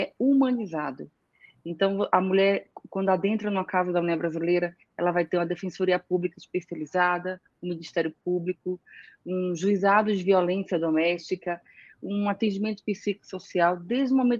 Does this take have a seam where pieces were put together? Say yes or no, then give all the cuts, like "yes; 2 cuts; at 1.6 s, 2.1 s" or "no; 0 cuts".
no; 0 cuts